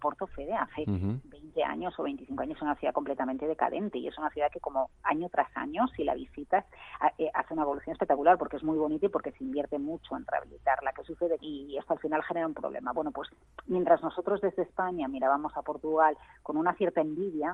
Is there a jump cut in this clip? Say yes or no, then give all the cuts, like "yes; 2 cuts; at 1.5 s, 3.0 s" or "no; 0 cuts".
yes; 1 cut; at 11.4 s